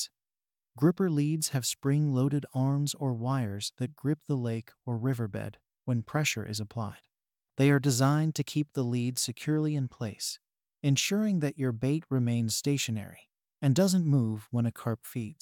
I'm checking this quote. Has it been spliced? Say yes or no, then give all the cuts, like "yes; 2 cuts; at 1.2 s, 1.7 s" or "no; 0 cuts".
no; 0 cuts